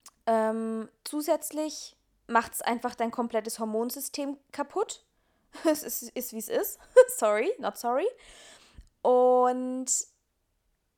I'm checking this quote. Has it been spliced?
no; 0 cuts

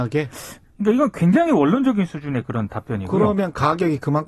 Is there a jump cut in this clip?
no; 0 cuts

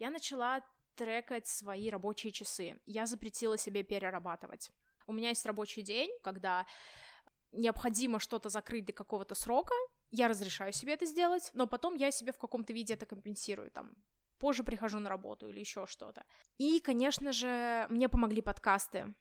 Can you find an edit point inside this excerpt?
yes; 2 cuts; at 5.0 s, 6.2 s

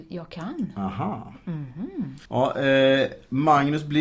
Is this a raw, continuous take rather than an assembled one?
no; 1 cut; at 2.2 s

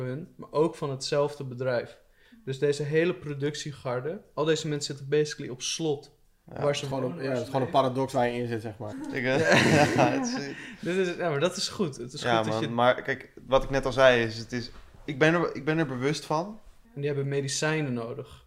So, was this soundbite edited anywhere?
yes; 2 cuts; at 8.9 s, 16.8 s

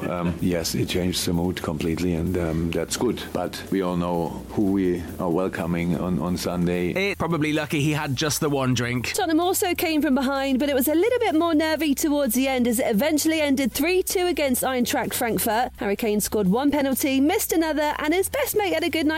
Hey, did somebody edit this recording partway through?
yes; 2 cuts; at 6.0 s, 7.1 s

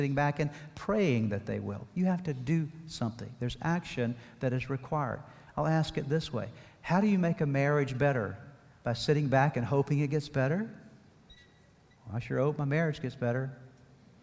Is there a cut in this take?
no; 0 cuts

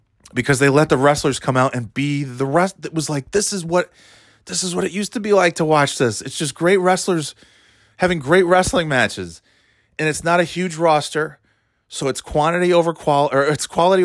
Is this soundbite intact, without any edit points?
yes; 0 cuts

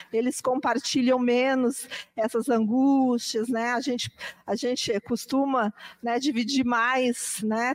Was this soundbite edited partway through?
no; 0 cuts

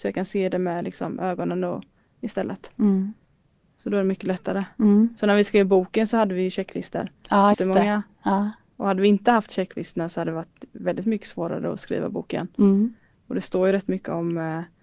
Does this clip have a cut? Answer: yes; 2 cuts; at 7.5 s, 8.7 s

